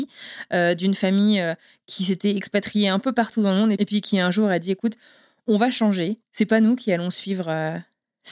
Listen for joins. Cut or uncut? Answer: uncut